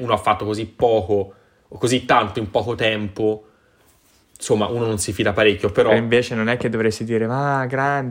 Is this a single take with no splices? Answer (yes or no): yes